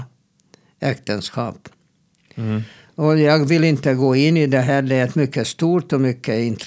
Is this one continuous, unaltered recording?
yes; 0 cuts

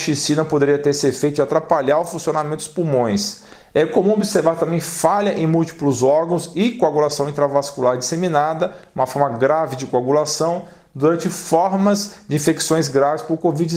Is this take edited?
no; 0 cuts

